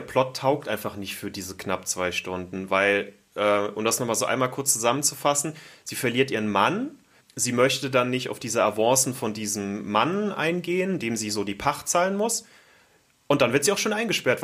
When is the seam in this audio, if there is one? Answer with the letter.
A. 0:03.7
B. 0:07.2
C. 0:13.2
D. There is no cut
B